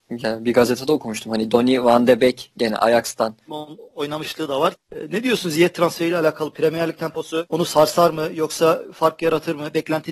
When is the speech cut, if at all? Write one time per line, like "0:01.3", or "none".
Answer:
0:03.5
0:04.7